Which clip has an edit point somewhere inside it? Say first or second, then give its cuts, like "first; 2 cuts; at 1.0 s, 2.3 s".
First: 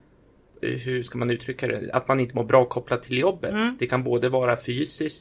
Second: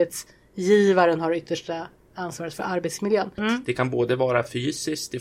second; 1 cut; at 3.4 s